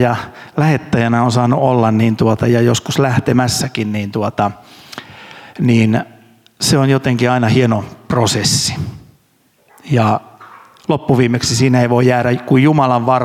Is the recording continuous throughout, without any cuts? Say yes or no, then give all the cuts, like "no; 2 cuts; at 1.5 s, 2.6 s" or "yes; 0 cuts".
yes; 0 cuts